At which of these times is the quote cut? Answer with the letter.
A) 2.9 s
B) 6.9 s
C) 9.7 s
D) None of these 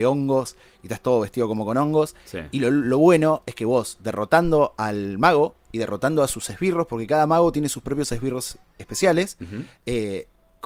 D